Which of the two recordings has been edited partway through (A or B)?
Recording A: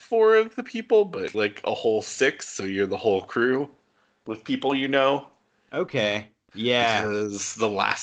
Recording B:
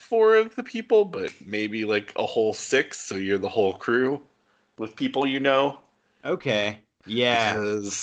A